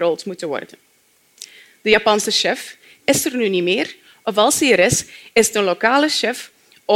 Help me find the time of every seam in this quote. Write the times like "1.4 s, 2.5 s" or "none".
3.0 s